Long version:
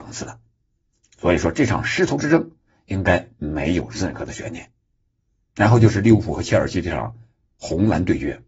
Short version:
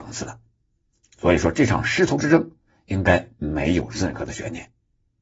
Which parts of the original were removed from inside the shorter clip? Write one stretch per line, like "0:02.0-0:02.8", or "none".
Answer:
none